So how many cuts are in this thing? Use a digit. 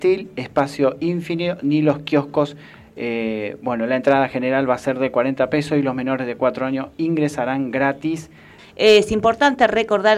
1